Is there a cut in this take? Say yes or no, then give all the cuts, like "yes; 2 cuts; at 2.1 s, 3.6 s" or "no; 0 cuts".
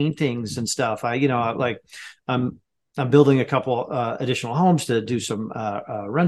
no; 0 cuts